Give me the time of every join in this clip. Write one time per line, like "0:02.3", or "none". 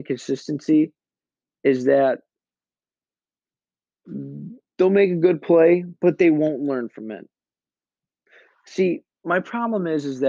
none